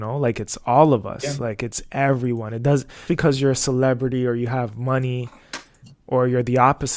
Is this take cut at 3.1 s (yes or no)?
yes